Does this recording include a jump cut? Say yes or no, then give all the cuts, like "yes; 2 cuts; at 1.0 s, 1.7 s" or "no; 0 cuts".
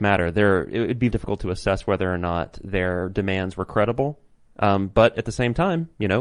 yes; 1 cut; at 1.1 s